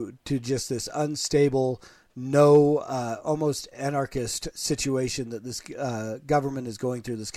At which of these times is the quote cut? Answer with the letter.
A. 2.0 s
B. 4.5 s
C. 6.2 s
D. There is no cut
B